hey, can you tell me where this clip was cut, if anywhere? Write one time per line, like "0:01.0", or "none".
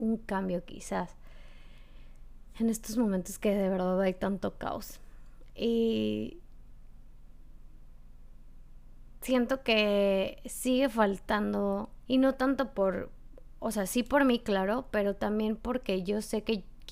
0:12.1